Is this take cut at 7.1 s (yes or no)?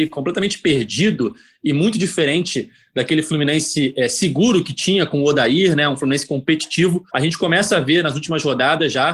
yes